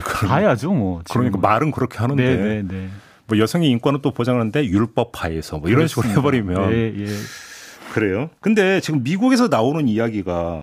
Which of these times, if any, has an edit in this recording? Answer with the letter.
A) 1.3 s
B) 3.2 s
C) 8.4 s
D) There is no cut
C